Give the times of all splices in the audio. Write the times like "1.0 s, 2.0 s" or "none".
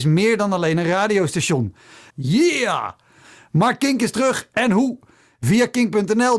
2.1 s

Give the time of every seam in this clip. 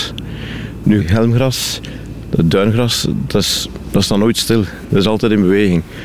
1.0 s

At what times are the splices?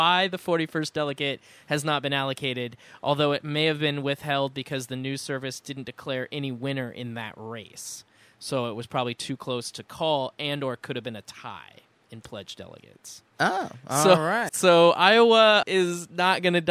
14.5 s, 15.6 s

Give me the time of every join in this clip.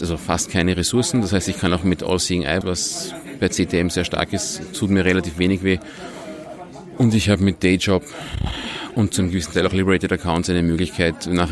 2.6 s

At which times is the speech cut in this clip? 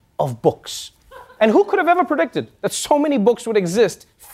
1.4 s

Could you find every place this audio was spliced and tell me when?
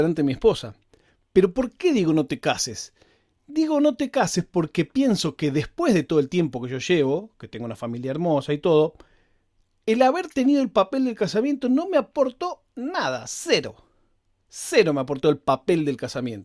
14.4 s

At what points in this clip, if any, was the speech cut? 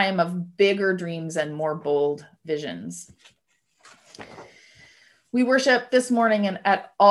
none

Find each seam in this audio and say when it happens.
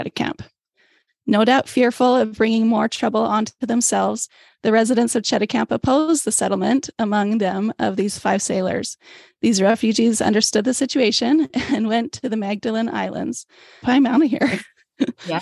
13.8 s

